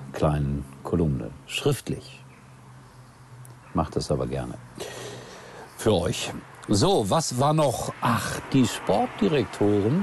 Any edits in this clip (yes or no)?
yes